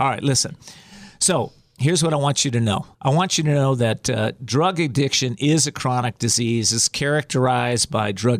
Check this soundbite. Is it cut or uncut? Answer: cut